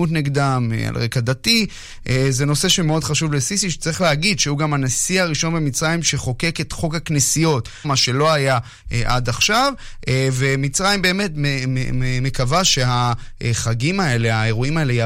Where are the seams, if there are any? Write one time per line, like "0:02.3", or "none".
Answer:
0:07.8